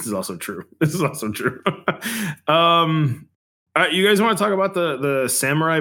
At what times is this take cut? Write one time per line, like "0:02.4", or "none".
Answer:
none

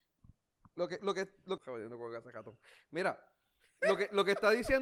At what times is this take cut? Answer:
0:01.6

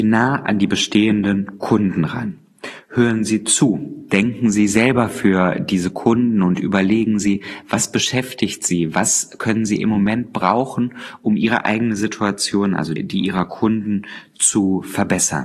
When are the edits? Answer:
0:13.0

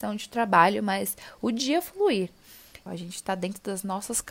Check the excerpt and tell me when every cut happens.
0:02.9

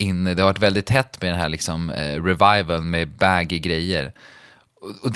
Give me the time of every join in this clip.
none

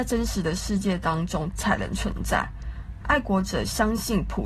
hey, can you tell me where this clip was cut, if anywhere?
0:01.5

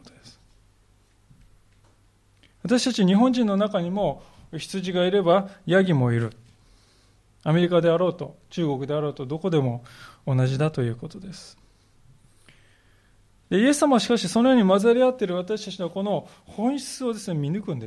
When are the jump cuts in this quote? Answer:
none

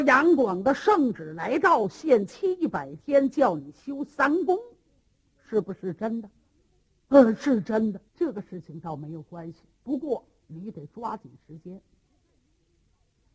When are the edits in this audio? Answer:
0:08.1

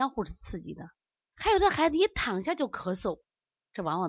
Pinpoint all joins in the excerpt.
0:01.3

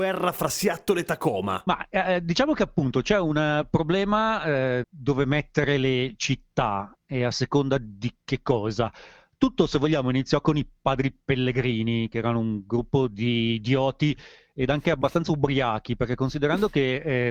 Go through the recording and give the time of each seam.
0:04.8

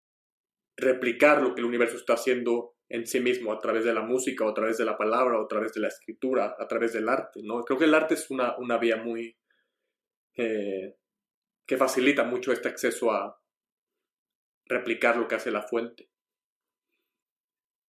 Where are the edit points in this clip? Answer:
none

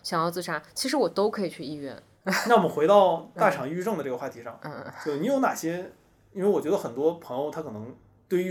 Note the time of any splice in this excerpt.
none

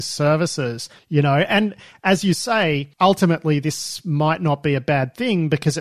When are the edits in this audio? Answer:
0:01.0
0:02.9

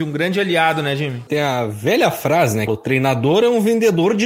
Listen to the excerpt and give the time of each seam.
0:01.3
0:02.7

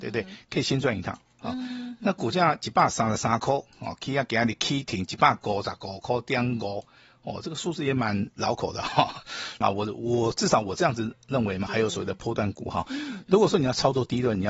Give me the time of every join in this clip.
0:09.6
0:11.7

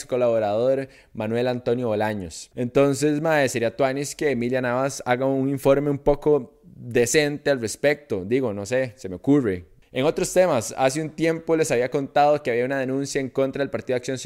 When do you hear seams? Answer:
0:02.5

